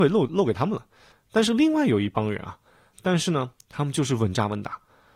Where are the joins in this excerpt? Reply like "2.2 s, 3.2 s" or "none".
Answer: 1.1 s, 2.9 s